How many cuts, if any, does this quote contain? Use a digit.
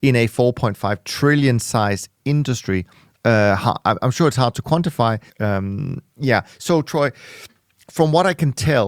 1